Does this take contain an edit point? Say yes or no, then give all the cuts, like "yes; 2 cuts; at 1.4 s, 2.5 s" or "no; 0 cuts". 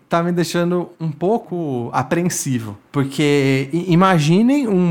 no; 0 cuts